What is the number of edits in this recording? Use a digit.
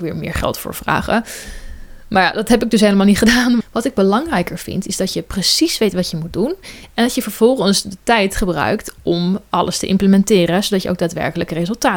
1